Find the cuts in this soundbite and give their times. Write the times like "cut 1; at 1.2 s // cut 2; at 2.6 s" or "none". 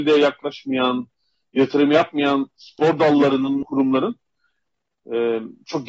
cut 1; at 3.6 s